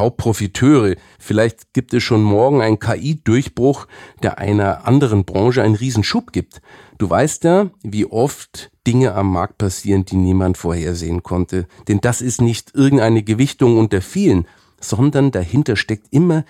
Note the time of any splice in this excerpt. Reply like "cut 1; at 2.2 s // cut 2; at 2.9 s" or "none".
cut 1; at 1.2 s // cut 2; at 11.8 s

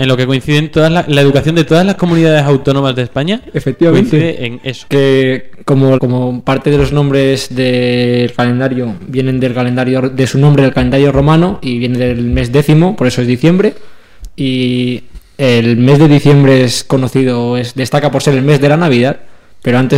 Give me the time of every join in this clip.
cut 1; at 4.9 s // cut 2; at 6.0 s

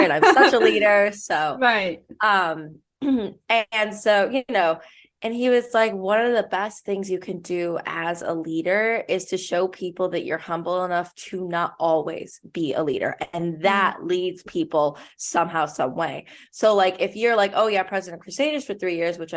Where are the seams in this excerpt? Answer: none

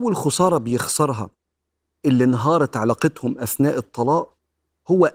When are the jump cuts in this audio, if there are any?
none

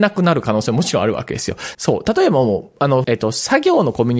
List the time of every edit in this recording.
cut 1; at 1.7 s // cut 2; at 3.0 s

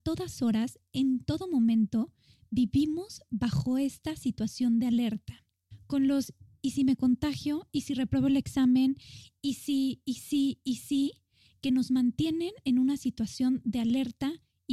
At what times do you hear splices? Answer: cut 1; at 7.7 s

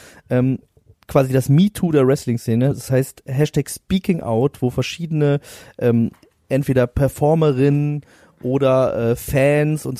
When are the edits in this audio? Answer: none

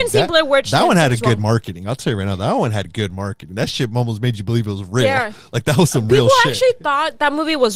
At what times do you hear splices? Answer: none

